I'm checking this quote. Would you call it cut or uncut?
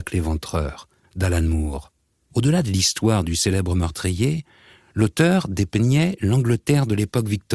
cut